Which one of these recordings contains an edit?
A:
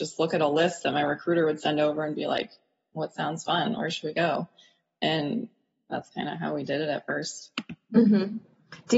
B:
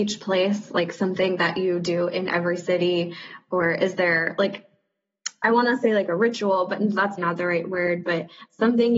B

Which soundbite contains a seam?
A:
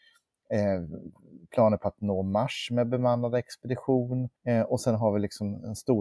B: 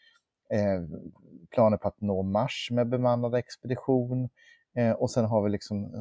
A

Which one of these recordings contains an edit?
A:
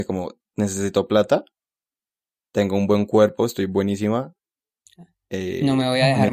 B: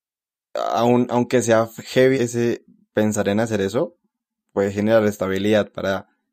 B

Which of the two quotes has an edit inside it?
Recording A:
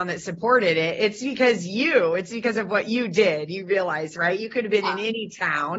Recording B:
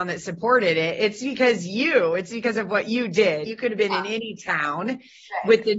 B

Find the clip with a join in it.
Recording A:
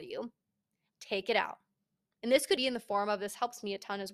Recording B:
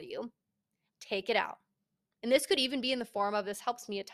A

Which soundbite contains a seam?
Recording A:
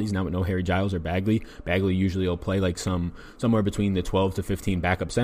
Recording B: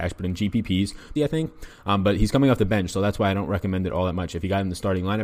B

